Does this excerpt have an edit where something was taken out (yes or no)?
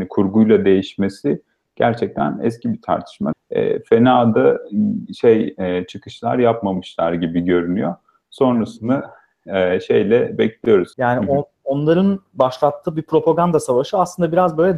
yes